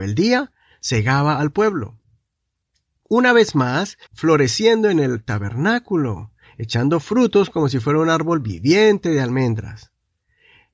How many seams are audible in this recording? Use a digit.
1